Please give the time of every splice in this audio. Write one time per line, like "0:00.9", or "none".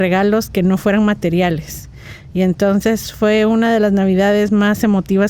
none